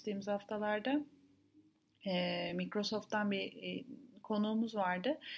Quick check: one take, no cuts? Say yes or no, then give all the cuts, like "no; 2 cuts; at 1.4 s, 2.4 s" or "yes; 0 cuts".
yes; 0 cuts